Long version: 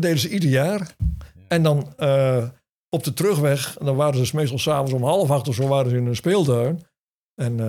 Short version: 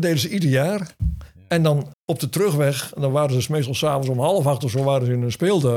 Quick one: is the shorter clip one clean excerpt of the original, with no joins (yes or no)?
no